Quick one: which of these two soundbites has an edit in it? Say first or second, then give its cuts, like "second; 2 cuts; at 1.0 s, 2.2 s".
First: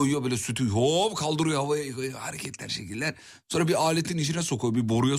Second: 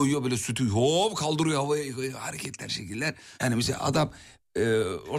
second; 1 cut; at 3.4 s